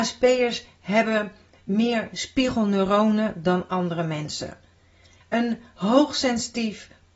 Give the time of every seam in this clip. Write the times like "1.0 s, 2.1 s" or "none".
5.2 s